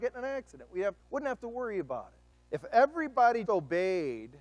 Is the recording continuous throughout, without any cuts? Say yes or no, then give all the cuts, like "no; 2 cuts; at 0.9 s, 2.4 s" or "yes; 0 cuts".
no; 3 cuts; at 1.0 s, 2.3 s, 3.4 s